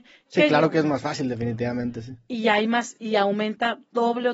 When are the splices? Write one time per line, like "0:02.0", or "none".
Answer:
none